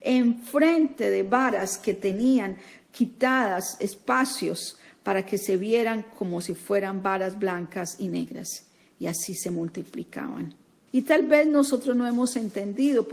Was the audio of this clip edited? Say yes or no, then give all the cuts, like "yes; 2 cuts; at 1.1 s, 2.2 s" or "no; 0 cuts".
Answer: yes; 1 cut; at 10.9 s